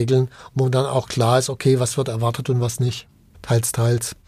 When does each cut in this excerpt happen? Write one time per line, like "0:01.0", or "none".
0:03.3